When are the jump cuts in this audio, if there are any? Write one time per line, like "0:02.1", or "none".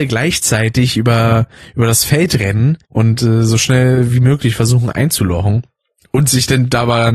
0:02.8